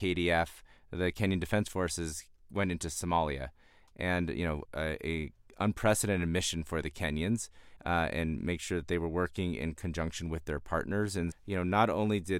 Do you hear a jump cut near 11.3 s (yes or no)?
yes